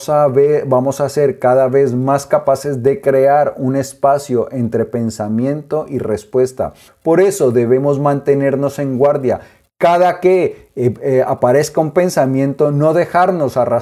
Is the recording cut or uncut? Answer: cut